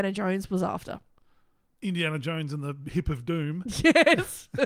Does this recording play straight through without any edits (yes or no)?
yes